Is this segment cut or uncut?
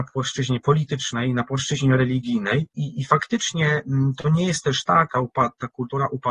cut